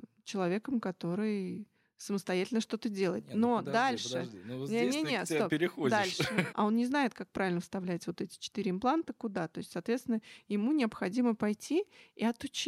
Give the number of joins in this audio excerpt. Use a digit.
1